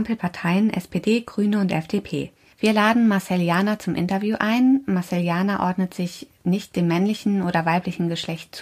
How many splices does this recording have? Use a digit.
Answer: 1